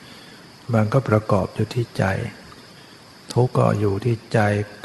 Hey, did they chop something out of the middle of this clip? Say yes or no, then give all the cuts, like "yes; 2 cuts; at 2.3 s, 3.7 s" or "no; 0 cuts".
yes; 1 cut; at 3.5 s